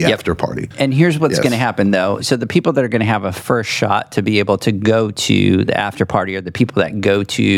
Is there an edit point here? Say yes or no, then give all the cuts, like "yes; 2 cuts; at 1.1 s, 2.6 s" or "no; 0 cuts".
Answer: no; 0 cuts